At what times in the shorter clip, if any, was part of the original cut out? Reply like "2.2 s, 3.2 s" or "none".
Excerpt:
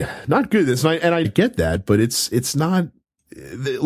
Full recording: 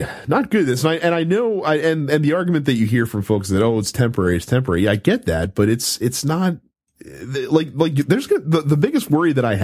1.2 s